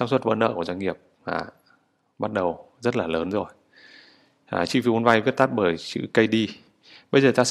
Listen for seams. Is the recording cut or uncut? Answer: uncut